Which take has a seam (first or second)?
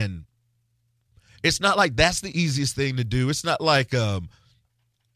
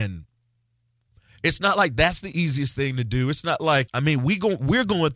second